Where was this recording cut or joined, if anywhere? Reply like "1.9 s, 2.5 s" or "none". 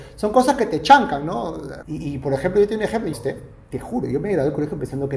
1.8 s, 3.1 s